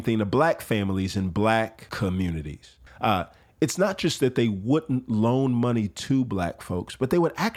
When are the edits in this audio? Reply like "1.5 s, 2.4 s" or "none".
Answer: 2.9 s